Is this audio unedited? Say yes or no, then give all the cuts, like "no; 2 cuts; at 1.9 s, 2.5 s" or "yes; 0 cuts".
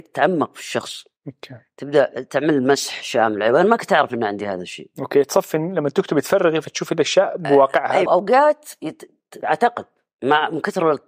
no; 2 cuts; at 8.1 s, 9.4 s